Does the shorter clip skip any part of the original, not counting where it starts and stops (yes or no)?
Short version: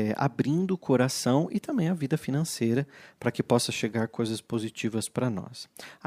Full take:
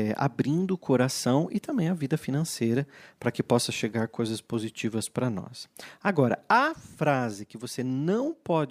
no